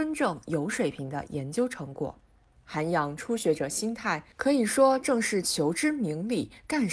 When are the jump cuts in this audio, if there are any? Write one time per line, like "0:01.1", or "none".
0:02.5